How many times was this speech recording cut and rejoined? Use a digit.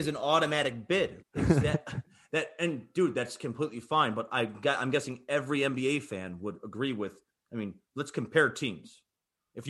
1